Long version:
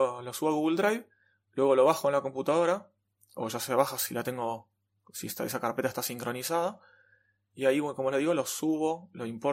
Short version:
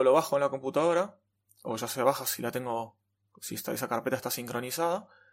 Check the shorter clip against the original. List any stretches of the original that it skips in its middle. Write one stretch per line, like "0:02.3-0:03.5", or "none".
none